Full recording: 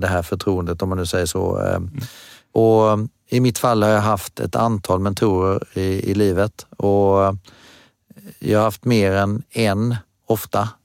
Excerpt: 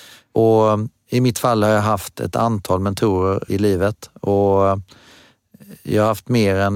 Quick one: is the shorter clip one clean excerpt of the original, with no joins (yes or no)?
no